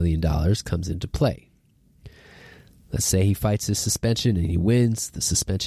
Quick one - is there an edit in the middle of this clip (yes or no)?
no